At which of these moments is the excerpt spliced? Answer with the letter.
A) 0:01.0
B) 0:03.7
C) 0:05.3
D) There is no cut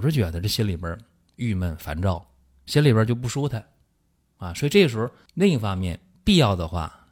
C